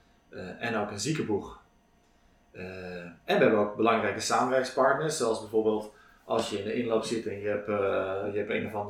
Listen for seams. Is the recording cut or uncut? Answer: uncut